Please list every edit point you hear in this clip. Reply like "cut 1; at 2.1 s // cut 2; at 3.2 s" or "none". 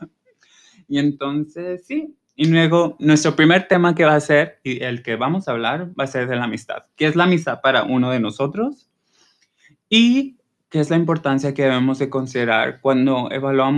none